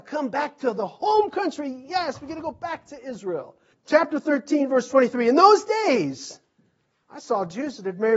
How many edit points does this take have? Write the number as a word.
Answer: one